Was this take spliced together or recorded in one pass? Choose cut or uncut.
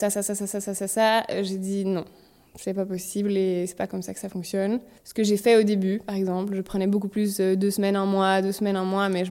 uncut